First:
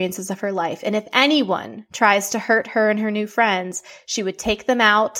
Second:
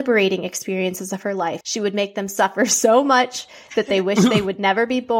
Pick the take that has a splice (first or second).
second